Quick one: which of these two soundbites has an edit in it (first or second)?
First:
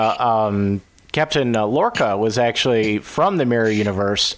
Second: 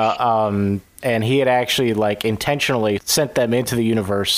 second